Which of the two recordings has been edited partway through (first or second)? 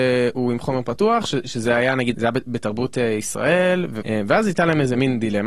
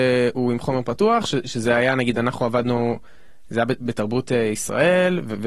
first